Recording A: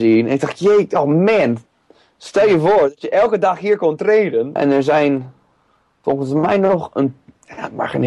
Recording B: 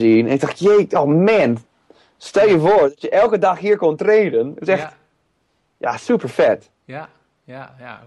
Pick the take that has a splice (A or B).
A